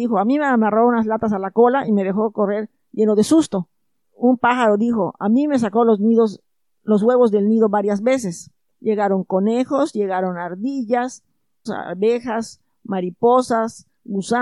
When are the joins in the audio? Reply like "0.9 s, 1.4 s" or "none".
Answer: 8.7 s, 11.7 s

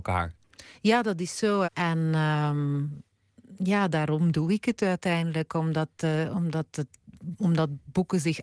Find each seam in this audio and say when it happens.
1.6 s

